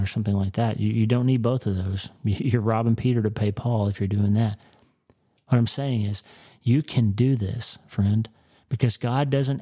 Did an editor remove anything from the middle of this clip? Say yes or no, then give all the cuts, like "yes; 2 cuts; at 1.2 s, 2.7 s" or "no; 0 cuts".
no; 0 cuts